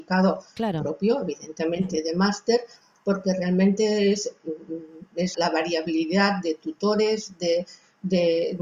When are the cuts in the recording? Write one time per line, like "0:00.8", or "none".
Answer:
0:05.3